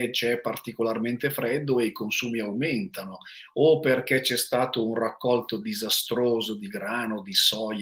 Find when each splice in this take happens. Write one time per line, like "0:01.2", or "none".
none